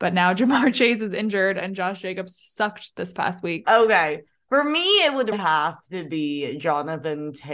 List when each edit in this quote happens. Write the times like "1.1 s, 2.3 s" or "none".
3.6 s, 5.3 s